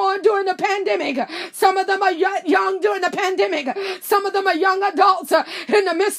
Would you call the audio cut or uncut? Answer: uncut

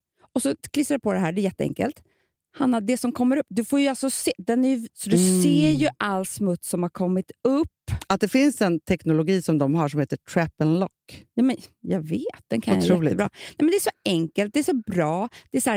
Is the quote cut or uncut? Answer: cut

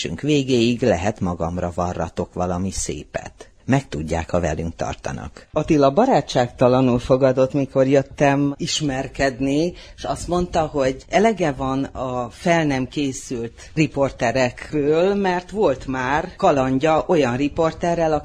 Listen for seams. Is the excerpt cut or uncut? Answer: uncut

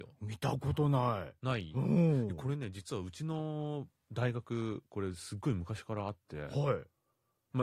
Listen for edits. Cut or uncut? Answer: uncut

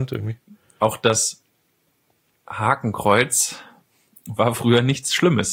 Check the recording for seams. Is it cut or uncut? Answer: uncut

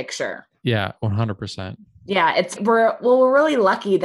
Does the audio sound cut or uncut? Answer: cut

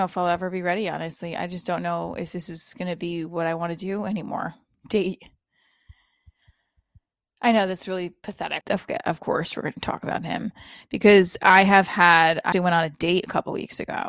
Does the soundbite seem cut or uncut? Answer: cut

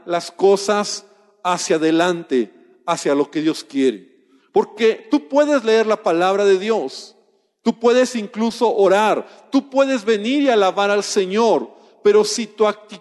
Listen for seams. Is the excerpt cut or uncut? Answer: uncut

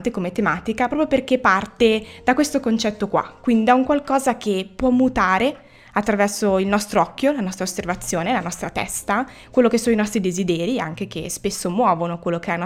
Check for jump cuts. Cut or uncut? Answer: uncut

